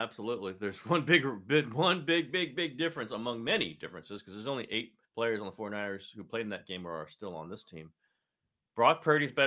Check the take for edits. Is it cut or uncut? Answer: cut